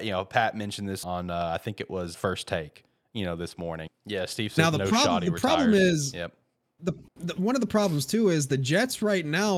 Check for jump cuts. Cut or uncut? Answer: cut